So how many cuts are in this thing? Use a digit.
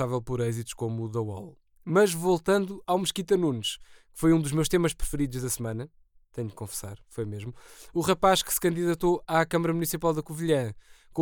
0